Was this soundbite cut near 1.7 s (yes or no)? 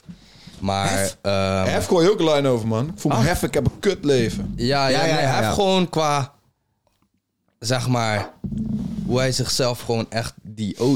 no